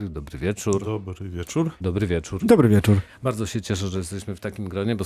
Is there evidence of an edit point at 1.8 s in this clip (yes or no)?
yes